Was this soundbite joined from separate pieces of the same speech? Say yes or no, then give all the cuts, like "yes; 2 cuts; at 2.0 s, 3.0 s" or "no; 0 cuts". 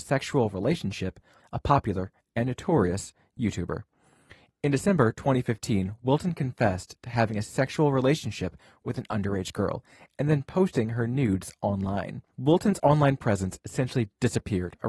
yes; 2 cuts; at 1.4 s, 12.3 s